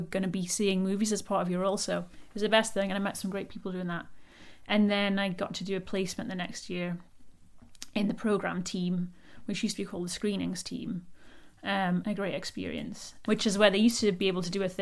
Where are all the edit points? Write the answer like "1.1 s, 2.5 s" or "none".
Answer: 12.0 s, 13.3 s

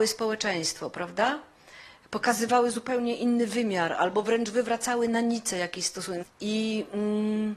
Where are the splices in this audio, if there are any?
6.2 s

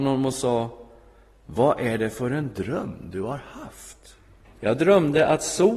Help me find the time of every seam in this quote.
4.4 s

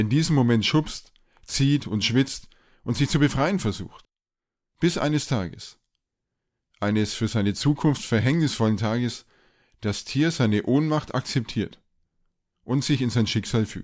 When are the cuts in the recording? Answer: 4.7 s

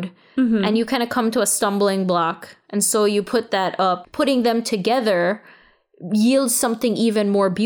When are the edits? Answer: 4.0 s

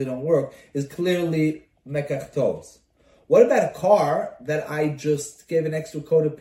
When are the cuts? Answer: none

